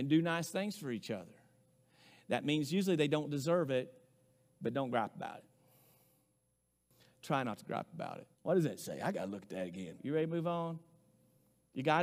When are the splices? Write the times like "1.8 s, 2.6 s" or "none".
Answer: 8.3 s, 10.0 s